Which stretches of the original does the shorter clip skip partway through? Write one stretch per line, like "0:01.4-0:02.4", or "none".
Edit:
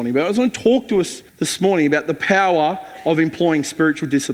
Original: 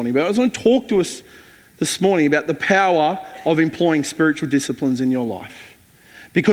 0:01.3-0:01.7